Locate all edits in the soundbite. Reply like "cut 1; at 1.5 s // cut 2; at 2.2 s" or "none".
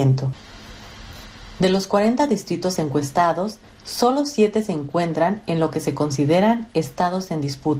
cut 1; at 1.6 s // cut 2; at 3.6 s